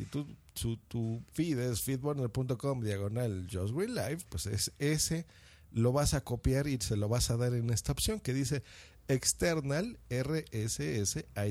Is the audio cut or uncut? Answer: cut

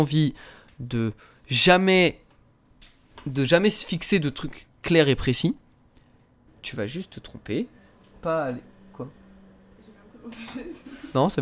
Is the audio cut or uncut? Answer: cut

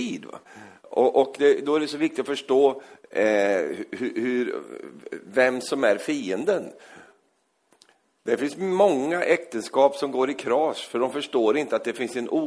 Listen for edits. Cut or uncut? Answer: uncut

